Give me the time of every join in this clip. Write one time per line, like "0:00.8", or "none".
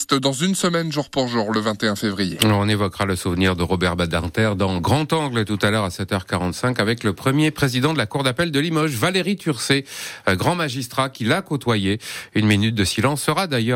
none